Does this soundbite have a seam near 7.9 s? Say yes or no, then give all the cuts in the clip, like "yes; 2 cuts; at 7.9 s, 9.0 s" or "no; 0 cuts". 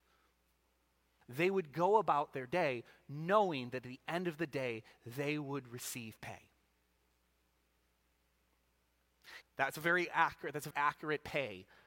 no; 3 cuts; at 1.2 s, 9.4 s, 10.7 s